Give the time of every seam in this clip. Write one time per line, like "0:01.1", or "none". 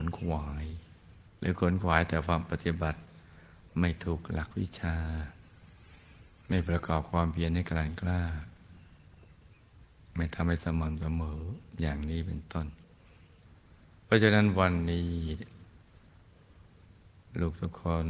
0:01.3

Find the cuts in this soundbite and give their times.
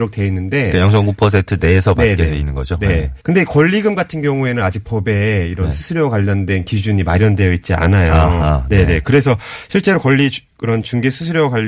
0:03.2

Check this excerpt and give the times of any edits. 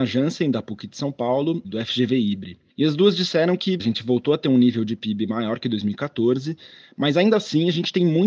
0:01.6
0:03.8

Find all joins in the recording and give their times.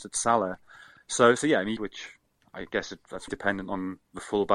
0:01.8
0:03.3

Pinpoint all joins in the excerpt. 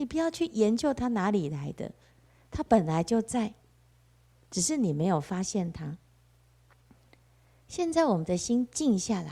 none

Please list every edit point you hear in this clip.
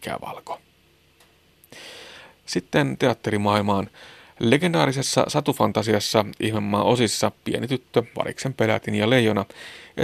0:08.1

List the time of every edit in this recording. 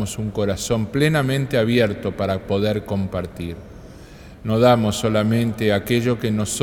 none

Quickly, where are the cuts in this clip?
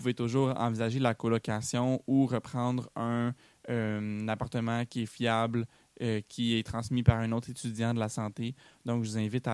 none

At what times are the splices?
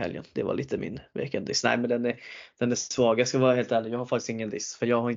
none

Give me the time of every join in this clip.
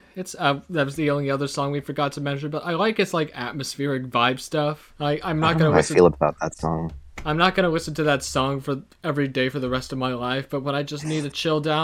none

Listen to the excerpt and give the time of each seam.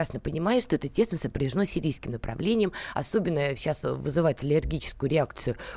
none

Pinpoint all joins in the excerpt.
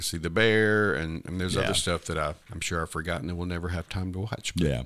0:02.4

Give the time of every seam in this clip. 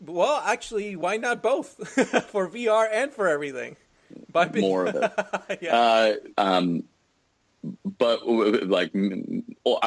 0:04.2
0:06.3

